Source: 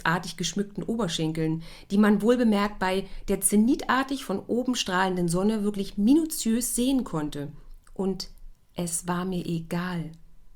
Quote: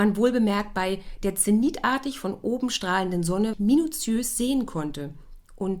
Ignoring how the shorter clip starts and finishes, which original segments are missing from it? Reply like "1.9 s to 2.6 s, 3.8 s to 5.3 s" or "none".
5.6 s to 5.9 s